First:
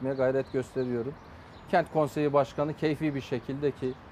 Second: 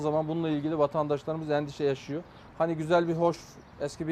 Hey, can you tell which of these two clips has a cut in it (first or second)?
second